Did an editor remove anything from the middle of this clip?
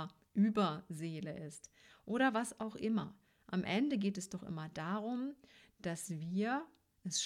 no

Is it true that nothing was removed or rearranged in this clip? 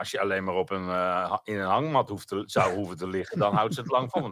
yes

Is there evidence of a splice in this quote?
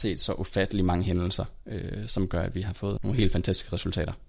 yes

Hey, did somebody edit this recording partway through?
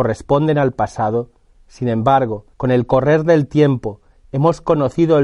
yes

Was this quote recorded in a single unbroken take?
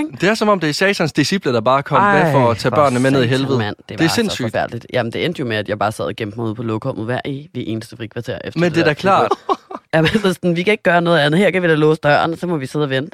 no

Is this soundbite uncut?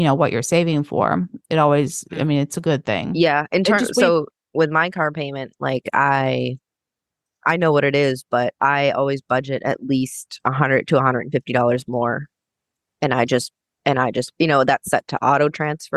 yes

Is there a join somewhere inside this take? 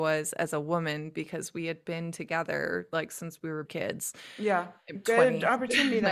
yes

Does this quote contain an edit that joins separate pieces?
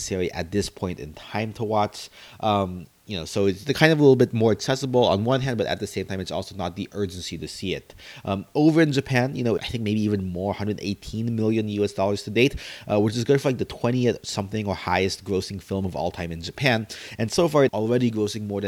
yes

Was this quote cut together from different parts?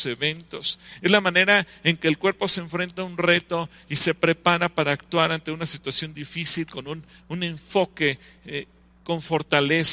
no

